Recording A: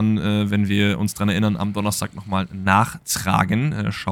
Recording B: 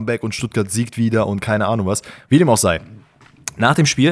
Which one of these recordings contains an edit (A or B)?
B